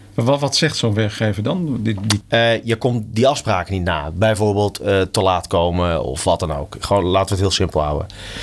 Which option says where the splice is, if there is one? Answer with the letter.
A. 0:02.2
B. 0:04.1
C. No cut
A